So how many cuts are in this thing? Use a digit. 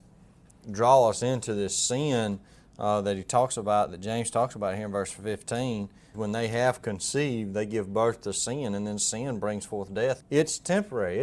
2